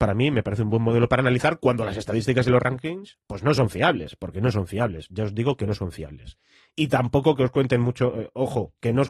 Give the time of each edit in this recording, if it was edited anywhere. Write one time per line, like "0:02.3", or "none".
none